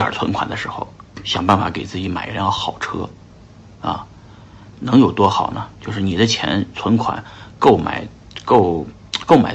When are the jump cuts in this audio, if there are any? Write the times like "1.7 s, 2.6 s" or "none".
4.8 s